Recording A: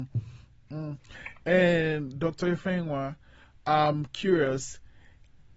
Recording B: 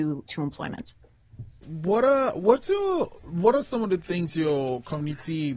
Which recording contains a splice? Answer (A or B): B